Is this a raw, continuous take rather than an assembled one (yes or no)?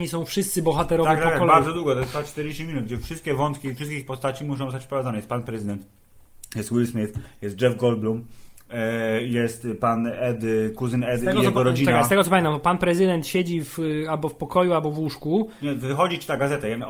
yes